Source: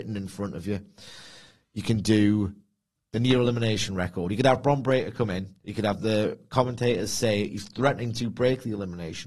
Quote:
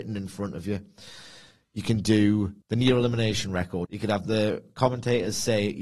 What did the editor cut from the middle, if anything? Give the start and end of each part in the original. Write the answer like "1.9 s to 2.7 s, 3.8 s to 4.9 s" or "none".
2.6 s to 3.1 s, 4.3 s to 5.6 s